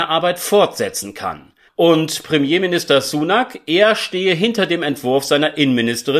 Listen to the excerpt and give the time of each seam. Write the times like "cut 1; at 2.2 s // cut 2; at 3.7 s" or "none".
cut 1; at 1.7 s